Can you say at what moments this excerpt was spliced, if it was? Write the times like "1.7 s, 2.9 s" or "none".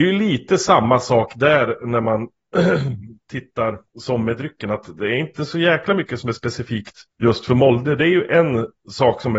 3.9 s, 7.1 s